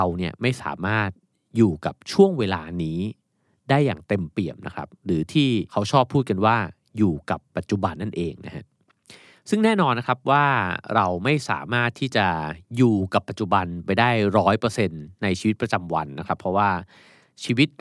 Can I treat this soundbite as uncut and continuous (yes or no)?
no